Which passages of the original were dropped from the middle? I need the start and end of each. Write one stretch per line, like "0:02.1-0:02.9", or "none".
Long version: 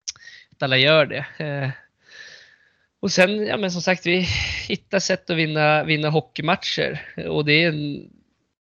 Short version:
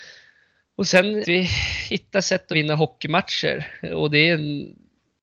0:03.5-0:04.0
0:05.3-0:05.9